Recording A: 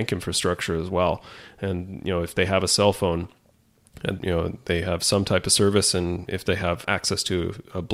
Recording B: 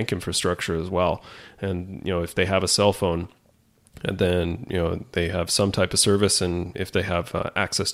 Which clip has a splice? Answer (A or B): A